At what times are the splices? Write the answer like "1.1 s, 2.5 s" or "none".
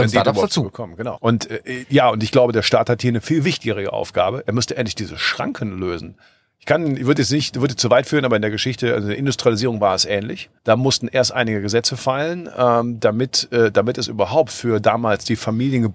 1.2 s, 10.6 s

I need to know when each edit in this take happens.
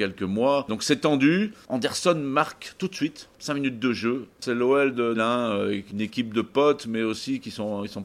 5.1 s

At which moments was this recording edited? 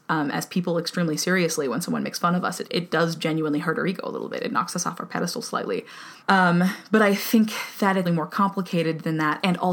2.6 s, 6.2 s, 8.1 s

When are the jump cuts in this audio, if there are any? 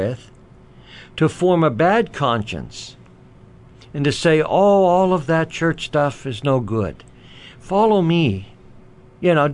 none

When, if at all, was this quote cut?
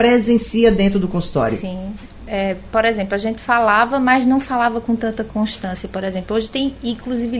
none

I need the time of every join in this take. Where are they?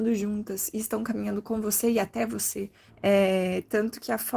2.9 s

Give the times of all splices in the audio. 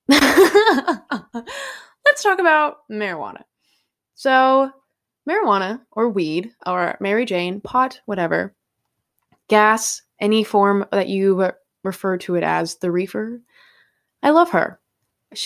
none

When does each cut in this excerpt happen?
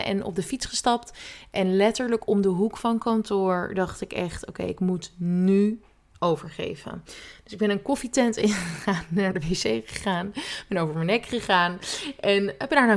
none

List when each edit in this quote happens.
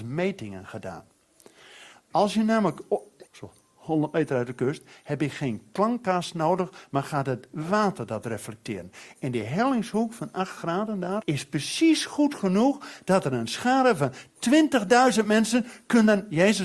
3.3 s, 11.2 s

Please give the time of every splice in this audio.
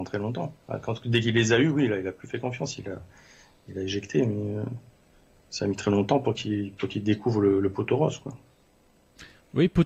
none

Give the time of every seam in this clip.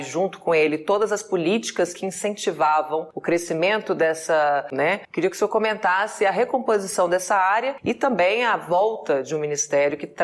4.7 s

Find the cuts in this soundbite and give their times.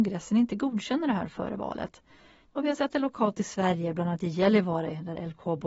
2.5 s

